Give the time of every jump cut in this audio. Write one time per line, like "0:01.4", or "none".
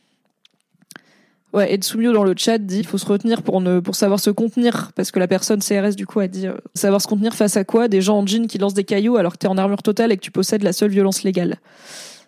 0:02.8
0:06.8

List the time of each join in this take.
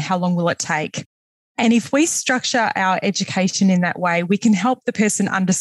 none

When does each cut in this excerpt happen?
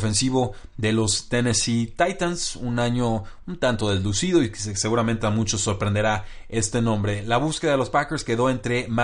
none

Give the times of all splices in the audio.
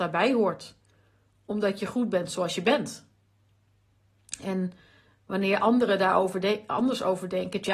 none

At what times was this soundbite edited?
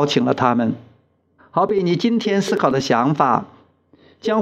0:01.4

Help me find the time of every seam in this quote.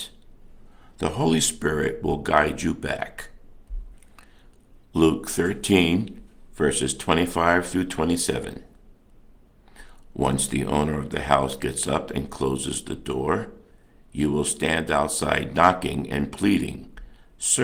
none

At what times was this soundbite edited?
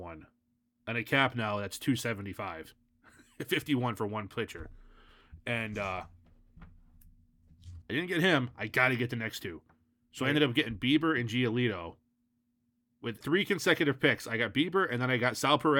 0:07.8
0:13.2

